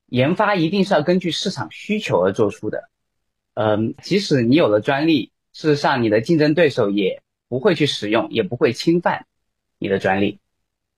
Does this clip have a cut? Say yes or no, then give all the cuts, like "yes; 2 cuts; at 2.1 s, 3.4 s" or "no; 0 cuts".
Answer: yes; 1 cut; at 4.0 s